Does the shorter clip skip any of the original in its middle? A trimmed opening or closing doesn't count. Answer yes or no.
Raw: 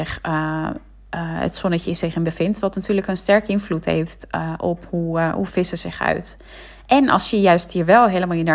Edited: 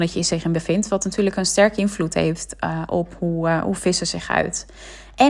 no